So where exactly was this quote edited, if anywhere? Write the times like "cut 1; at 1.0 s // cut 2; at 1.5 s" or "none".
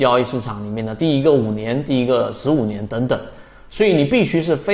cut 1; at 1.9 s

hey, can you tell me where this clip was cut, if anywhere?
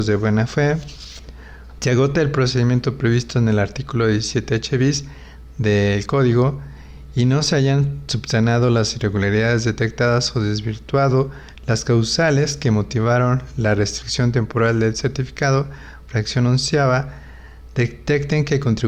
cut 1; at 1.8 s

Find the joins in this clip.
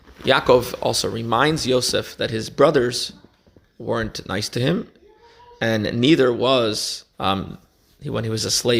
cut 1; at 7.1 s

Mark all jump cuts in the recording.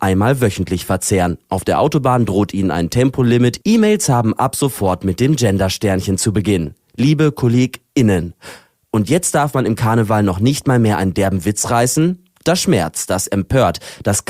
none

